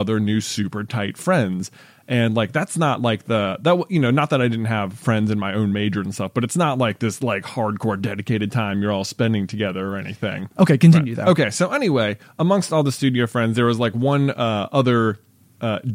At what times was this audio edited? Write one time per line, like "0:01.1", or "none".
0:10.5